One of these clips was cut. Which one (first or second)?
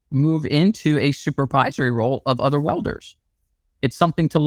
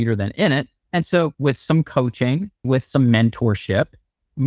second